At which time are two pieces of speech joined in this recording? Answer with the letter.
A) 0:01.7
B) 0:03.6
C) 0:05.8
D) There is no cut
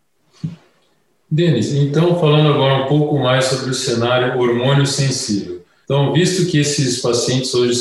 C